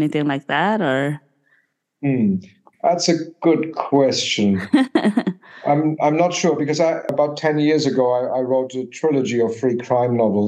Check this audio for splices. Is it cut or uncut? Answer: uncut